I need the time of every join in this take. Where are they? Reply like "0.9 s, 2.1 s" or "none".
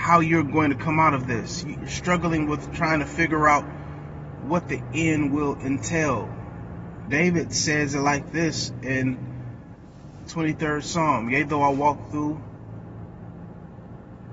1.7 s, 7.1 s

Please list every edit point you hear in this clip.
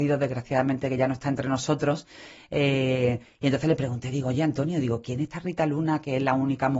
none

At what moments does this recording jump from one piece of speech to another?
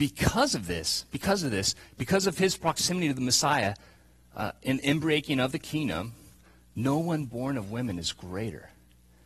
none

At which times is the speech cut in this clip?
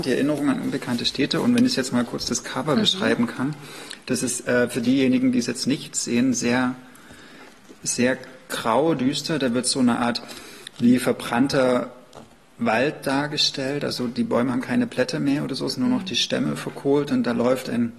none

